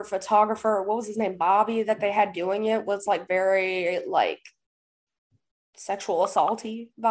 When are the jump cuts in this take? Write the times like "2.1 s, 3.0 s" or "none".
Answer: none